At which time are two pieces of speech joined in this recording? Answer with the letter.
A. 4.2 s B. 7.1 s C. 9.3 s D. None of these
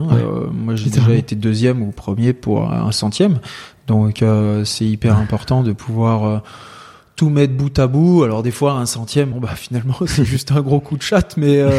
C